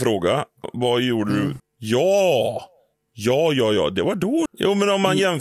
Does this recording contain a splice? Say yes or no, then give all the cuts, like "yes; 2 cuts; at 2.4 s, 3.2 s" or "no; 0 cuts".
yes; 2 cuts; at 1.6 s, 4.5 s